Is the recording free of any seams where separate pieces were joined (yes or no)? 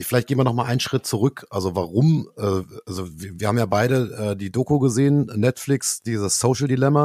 yes